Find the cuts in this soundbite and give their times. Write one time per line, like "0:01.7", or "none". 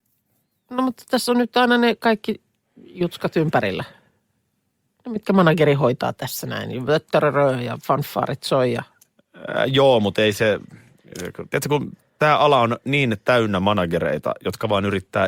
none